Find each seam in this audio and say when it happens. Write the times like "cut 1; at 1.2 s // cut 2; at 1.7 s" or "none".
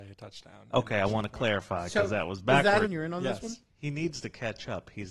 cut 1; at 2.9 s